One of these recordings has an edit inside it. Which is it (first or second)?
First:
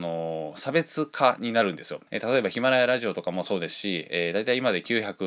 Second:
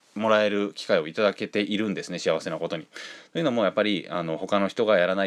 first